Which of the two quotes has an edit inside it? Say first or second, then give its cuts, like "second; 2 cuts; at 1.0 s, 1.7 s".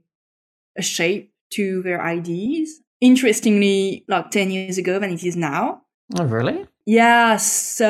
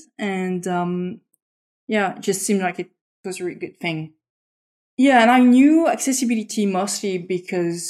first; 2 cuts; at 2.9 s, 4.0 s